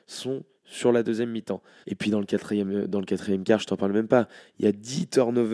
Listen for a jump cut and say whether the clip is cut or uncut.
cut